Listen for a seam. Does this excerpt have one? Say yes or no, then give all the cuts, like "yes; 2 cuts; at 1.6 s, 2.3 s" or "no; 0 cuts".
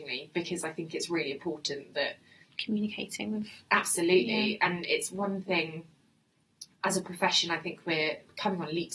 no; 0 cuts